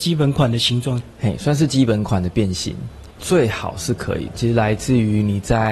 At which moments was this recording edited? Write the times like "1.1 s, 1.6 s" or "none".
3.2 s, 4.3 s